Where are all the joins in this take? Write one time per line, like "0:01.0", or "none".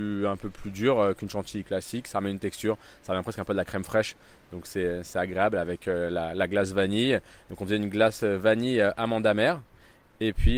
none